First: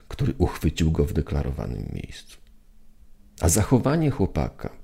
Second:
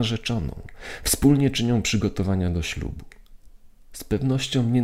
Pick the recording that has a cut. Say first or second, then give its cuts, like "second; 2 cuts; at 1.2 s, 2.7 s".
first; 1 cut; at 3.2 s